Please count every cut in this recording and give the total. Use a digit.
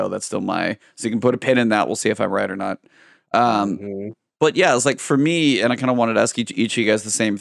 0